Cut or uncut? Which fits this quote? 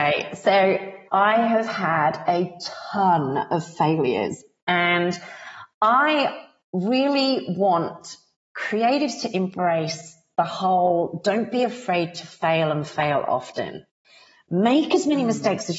cut